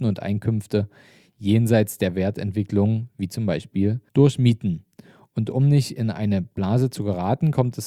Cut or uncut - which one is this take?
cut